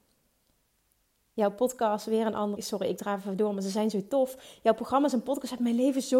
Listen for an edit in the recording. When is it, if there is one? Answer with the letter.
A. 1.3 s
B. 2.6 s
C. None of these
B